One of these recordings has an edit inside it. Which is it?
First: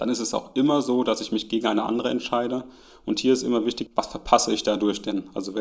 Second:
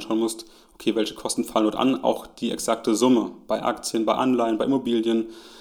first; 1 cut; at 3.9 s

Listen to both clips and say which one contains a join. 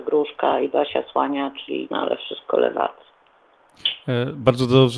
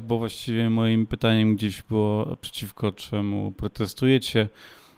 first; 1 cut; at 1.9 s

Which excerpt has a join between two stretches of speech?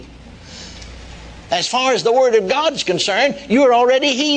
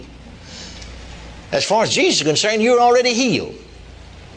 first; 1 cut; at 1.5 s

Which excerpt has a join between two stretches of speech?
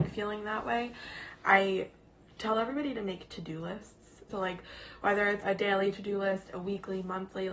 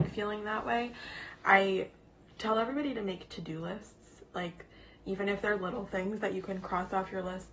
first; 2 cuts; at 4.3 s, 5.4 s

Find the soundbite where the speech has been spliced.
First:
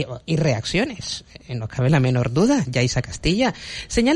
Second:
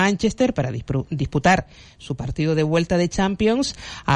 first; 1 cut; at 2.6 s

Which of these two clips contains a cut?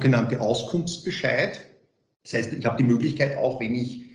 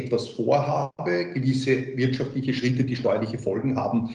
second; 1 cut; at 0.9 s

